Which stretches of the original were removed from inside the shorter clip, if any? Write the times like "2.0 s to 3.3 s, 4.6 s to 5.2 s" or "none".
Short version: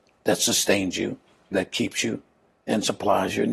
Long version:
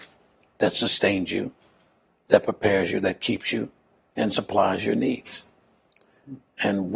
1.9 s to 3.0 s